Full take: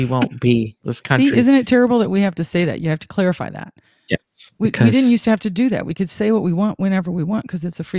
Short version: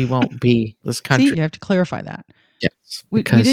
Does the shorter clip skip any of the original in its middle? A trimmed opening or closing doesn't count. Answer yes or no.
yes